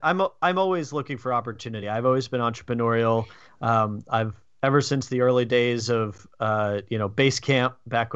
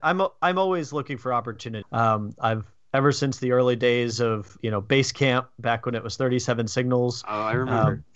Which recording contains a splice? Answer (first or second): second